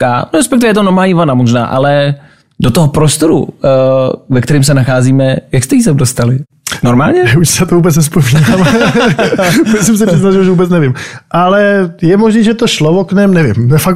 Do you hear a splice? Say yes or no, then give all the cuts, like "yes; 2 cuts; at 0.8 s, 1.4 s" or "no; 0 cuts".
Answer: no; 0 cuts